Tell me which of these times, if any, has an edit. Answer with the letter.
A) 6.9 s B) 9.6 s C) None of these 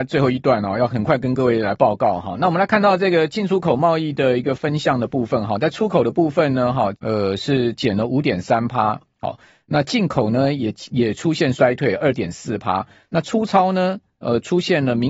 A